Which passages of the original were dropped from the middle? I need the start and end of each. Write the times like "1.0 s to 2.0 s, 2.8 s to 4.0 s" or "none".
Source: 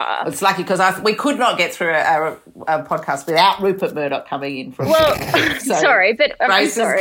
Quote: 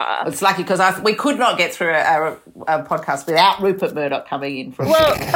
none